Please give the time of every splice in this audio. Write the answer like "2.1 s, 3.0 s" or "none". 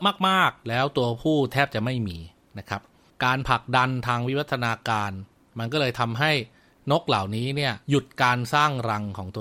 7.8 s